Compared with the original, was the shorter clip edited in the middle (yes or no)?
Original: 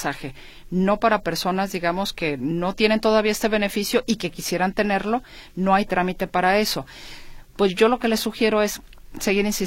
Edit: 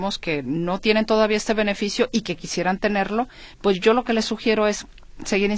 yes